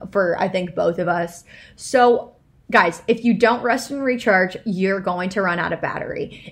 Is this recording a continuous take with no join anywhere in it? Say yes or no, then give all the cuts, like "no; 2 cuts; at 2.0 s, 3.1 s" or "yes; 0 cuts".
yes; 0 cuts